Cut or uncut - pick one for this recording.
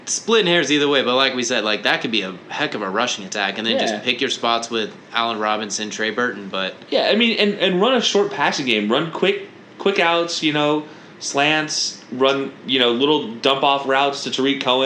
uncut